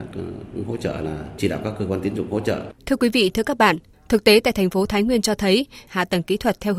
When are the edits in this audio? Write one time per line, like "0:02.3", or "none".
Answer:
0:02.8
0:05.9